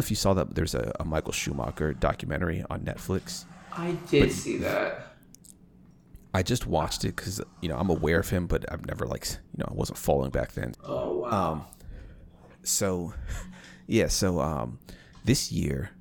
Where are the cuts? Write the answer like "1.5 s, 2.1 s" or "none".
10.7 s